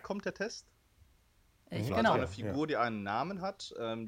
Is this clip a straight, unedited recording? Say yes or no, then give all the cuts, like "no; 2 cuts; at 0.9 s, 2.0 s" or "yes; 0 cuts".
no; 1 cut; at 1.9 s